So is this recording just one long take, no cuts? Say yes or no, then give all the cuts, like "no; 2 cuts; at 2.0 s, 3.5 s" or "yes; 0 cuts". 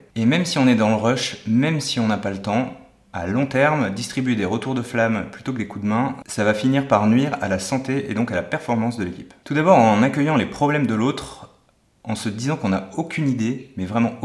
no; 1 cut; at 9.4 s